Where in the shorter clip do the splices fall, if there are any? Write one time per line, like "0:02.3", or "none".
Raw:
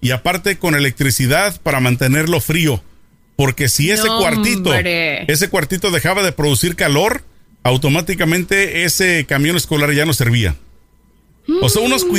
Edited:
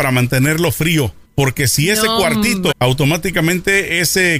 0:01.3
0:02.7